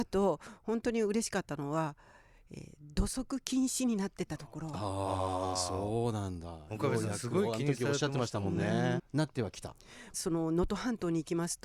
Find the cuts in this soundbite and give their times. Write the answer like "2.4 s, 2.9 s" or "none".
9.0 s, 10.1 s